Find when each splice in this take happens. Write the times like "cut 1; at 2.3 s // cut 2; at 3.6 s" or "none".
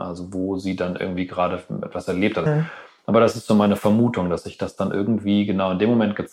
cut 1; at 2.5 s